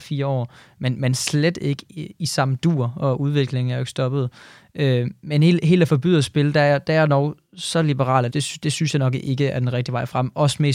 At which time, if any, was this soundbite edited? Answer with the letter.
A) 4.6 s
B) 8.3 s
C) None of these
B